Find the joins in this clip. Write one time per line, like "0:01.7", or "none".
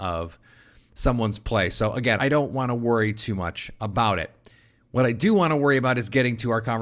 0:02.2